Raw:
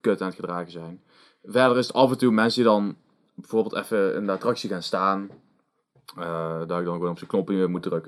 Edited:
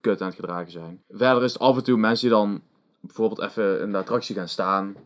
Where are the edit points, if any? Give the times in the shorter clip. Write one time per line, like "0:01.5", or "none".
0:01.0